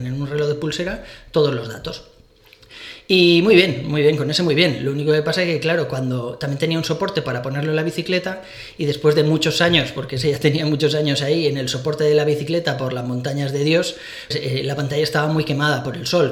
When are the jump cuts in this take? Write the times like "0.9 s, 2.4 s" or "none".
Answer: 14.3 s